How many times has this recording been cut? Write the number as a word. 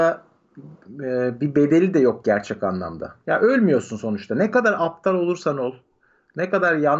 one